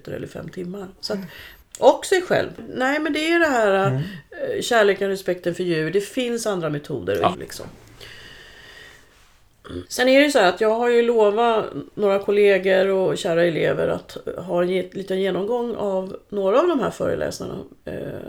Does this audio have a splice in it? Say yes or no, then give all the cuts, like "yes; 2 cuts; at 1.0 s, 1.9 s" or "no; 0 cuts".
yes; 3 cuts; at 1.6 s, 7.3 s, 9.8 s